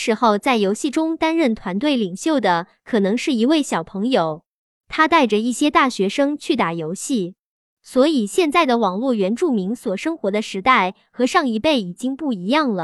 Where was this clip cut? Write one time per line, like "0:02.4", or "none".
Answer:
none